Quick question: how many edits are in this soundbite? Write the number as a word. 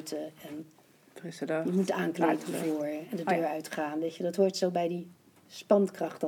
zero